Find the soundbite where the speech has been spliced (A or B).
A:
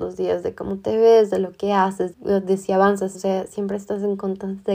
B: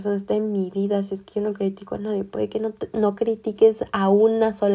A